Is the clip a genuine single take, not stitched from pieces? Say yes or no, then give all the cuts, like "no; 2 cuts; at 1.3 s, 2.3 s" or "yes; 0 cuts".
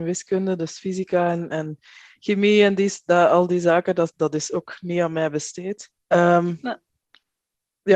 no; 1 cut; at 6.0 s